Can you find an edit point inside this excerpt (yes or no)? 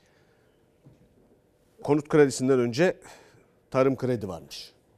yes